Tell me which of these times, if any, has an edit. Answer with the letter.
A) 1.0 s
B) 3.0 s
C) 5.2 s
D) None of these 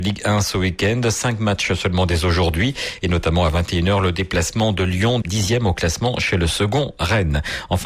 C